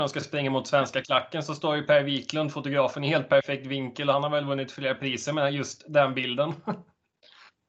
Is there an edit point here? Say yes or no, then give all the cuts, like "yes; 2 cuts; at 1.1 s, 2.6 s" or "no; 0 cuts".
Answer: no; 0 cuts